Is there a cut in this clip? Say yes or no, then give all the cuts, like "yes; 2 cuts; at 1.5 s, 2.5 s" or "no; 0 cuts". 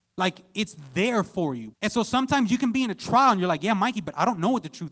yes; 1 cut; at 1.7 s